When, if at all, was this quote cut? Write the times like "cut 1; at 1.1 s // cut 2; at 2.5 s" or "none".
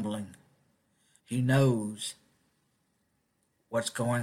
cut 1; at 1.2 s